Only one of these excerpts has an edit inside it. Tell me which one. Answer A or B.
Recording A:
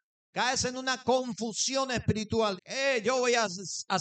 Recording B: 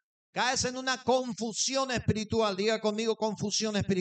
A